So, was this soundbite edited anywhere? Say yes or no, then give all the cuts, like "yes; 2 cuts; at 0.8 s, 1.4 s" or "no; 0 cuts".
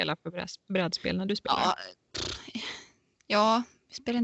no; 0 cuts